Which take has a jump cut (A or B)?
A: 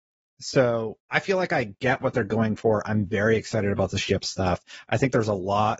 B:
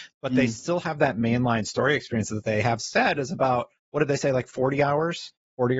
A